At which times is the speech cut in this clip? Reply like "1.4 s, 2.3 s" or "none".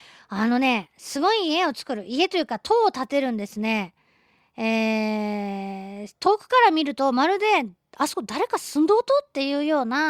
none

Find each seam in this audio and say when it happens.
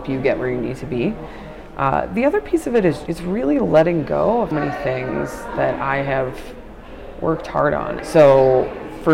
3.1 s, 4.5 s, 8.0 s

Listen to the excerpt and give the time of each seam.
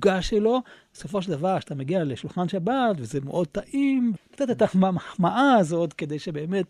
4.2 s

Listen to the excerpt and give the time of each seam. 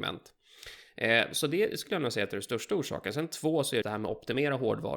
3.8 s

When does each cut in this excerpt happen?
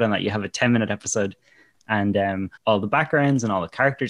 2.6 s

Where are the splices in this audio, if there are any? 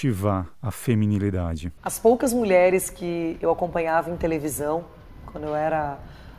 1.8 s

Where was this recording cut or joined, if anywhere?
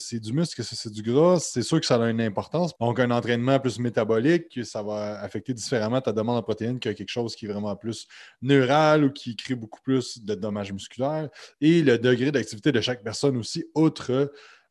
2.8 s

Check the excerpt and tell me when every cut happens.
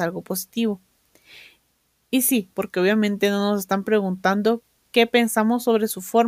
2.5 s

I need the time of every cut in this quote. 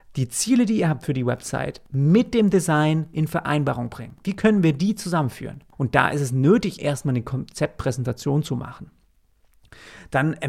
5.7 s, 6.8 s

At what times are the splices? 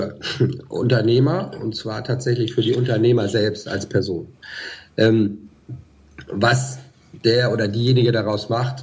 none

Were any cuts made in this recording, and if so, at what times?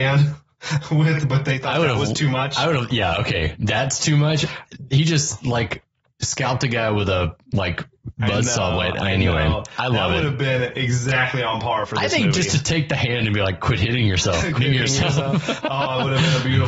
14.6 s

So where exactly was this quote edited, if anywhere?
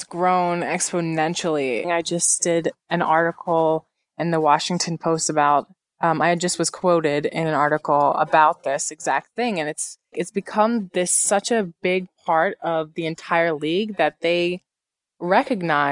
1.8 s, 10.1 s

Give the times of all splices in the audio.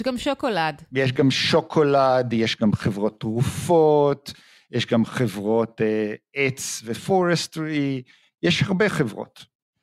none

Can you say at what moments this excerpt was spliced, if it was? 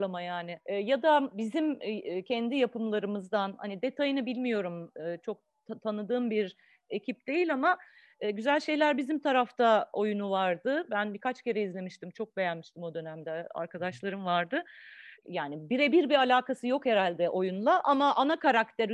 none

